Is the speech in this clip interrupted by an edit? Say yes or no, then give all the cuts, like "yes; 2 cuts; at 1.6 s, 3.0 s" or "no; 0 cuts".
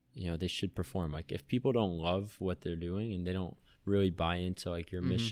no; 0 cuts